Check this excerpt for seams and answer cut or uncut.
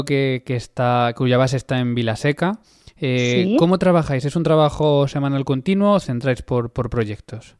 uncut